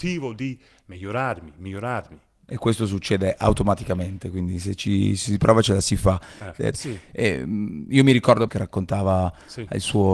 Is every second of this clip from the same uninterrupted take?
no; 2 cuts; at 6.7 s, 8.5 s

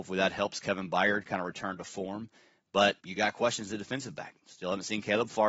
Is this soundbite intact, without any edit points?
no; 1 cut; at 3.0 s

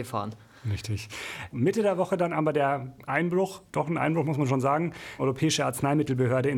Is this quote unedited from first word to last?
no; 3 cuts; at 1.5 s, 3.7 s, 5.2 s

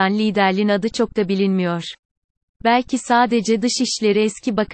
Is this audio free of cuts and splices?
yes; 0 cuts

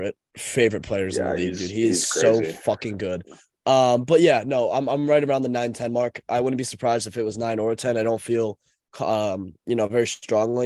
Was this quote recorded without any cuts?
yes; 0 cuts

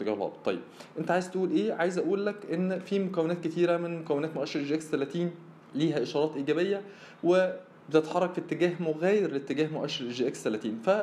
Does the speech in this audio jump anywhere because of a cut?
yes; 1 cut; at 5.6 s

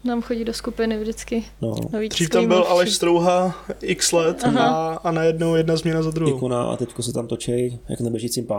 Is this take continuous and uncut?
yes; 0 cuts

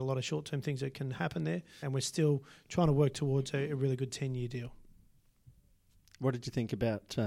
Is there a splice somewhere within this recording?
yes; 1 cut; at 1.8 s

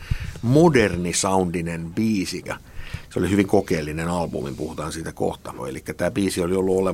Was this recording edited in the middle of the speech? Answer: yes; 2 cuts; at 2.5 s, 5.6 s

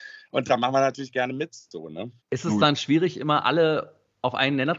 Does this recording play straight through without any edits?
no; 1 cut; at 2.2 s

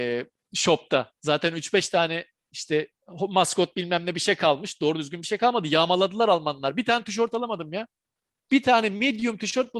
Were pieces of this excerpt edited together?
yes; 1 cut; at 1.2 s

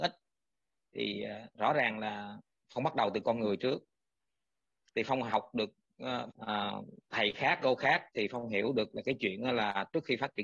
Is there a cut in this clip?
yes; 1 cut; at 6.3 s

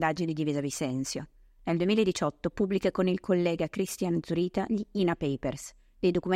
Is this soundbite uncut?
yes; 0 cuts

